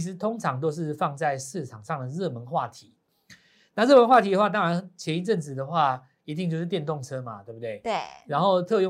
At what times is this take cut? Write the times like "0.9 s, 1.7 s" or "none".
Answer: none